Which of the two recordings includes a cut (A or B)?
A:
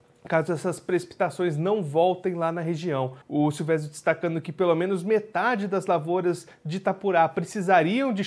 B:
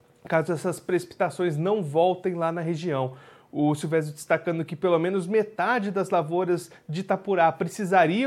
A